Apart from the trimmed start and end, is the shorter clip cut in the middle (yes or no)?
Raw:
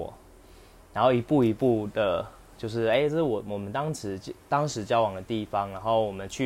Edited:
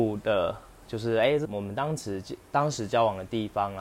yes